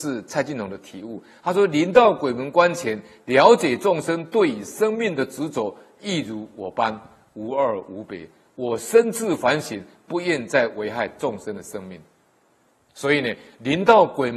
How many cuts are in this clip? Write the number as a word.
one